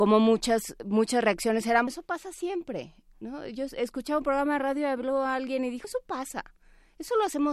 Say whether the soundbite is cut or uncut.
cut